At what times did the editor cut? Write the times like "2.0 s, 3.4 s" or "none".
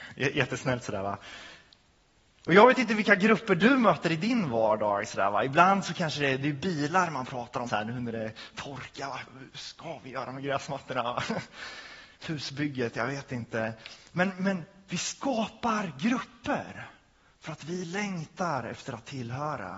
7.7 s, 12.1 s